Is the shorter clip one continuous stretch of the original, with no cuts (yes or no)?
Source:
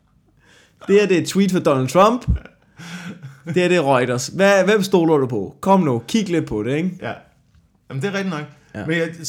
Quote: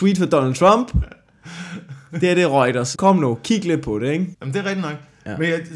no